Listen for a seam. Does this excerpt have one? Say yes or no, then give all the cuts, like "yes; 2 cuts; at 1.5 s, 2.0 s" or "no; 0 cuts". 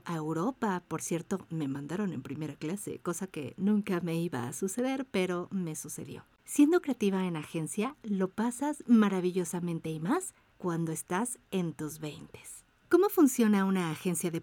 no; 0 cuts